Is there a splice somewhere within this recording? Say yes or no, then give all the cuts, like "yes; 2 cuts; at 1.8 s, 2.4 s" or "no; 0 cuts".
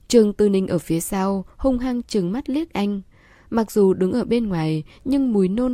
no; 0 cuts